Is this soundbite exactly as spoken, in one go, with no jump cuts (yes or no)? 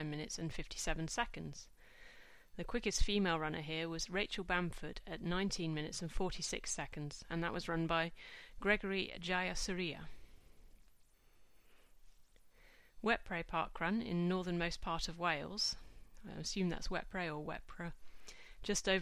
no